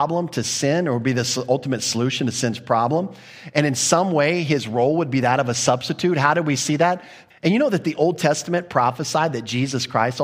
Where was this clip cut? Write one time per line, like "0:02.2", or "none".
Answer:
0:07.3

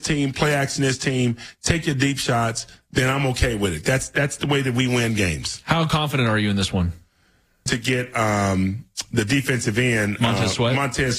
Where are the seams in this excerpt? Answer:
0:07.7

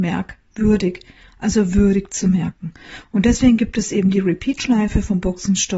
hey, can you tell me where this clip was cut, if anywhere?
none

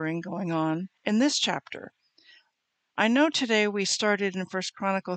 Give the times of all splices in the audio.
0:01.0

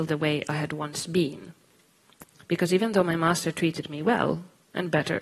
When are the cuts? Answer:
none

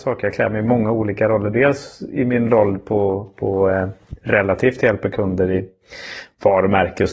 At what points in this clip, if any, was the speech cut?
none

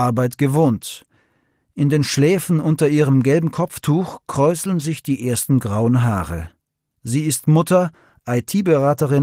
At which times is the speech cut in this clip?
none

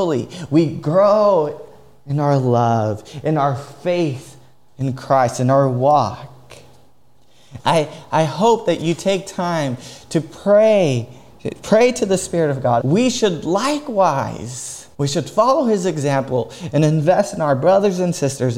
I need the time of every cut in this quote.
0:07.6
0:12.8
0:14.9

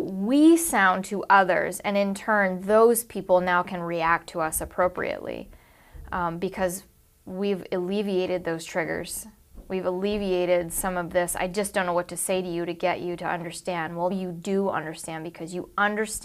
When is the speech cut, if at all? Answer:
0:14.1

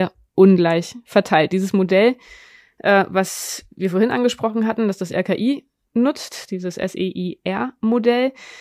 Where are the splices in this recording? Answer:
none

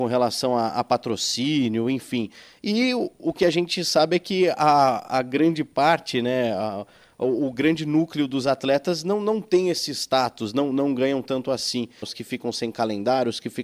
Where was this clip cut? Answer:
0:12.0

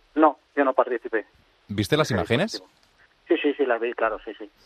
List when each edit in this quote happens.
none

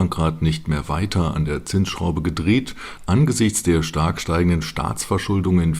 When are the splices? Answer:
0:03.0

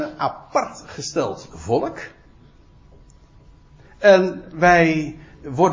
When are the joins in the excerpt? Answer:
none

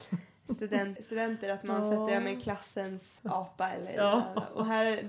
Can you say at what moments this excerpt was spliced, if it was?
0:01.0
0:03.2

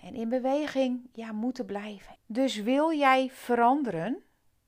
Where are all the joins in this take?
0:02.2

